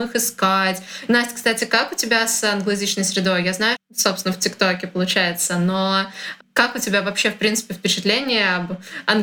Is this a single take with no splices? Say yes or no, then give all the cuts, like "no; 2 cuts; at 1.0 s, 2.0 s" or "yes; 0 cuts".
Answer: no; 2 cuts; at 1.1 s, 3.7 s